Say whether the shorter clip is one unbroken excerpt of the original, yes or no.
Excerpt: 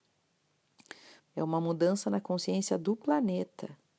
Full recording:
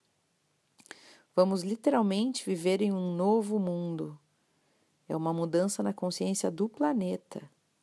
no